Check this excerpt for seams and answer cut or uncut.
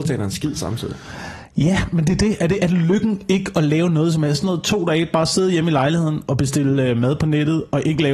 cut